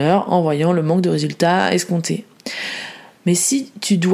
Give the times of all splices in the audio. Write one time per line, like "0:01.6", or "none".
0:03.2